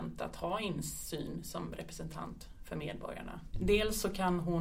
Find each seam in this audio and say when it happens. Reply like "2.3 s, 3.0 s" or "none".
3.5 s